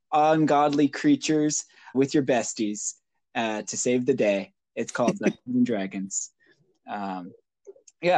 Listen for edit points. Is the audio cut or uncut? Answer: cut